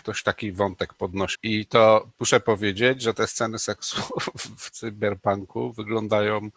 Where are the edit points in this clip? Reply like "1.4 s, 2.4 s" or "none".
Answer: 1.4 s